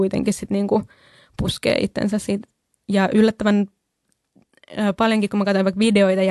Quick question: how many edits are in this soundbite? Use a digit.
0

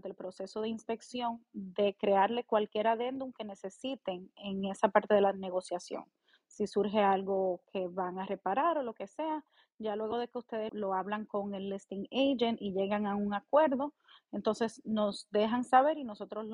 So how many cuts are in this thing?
1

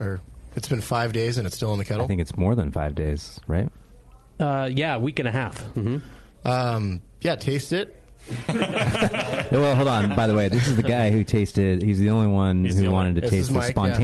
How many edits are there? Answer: 1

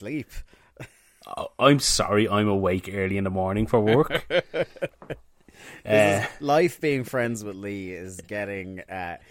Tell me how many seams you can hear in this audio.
0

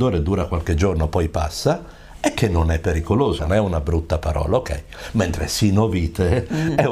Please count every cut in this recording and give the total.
1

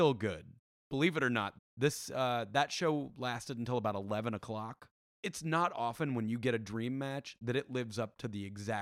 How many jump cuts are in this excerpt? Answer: 2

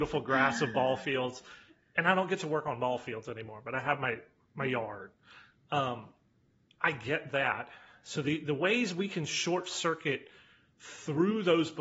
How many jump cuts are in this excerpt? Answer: 0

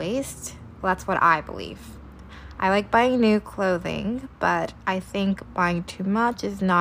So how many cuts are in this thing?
0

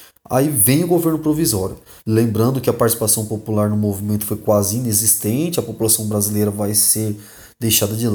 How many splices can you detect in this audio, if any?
1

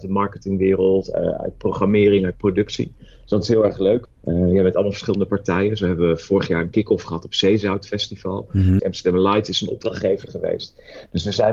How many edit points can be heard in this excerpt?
2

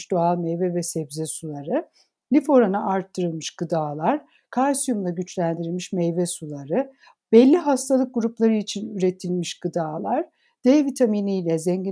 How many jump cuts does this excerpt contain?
0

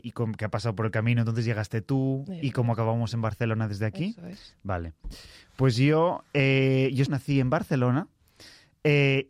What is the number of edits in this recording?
1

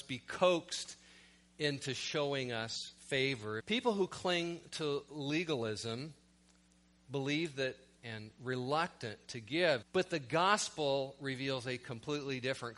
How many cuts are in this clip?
3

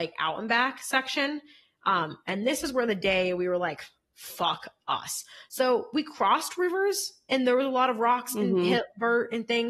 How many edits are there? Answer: 0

